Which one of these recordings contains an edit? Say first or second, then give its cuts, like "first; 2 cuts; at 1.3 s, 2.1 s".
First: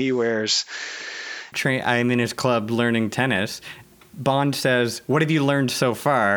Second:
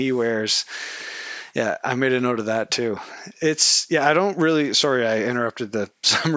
first; 1 cut; at 1.5 s